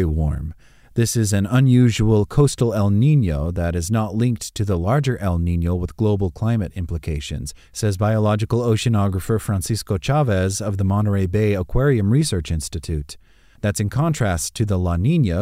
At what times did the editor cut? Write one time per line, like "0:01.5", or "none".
0:13.6